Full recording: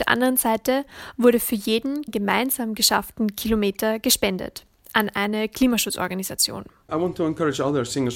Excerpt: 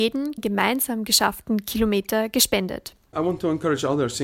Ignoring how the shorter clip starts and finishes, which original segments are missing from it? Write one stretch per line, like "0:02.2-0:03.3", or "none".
0:04.8-0:06.8